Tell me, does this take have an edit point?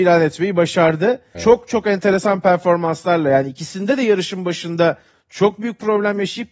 yes; 1 cut; at 1.3 s

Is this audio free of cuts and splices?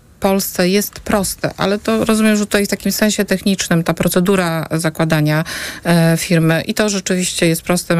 yes; 0 cuts

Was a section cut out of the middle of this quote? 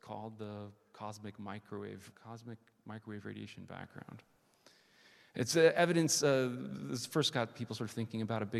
yes; 1 cut; at 2.1 s

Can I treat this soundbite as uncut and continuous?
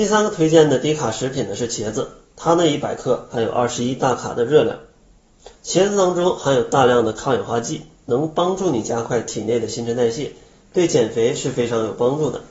no; 1 cut; at 5.5 s

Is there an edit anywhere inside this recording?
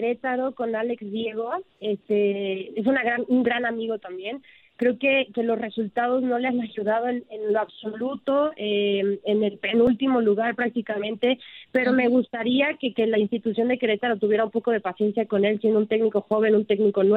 no; 0 cuts

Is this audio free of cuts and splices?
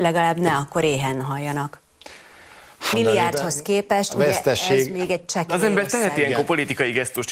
no; 1 cut; at 2.9 s

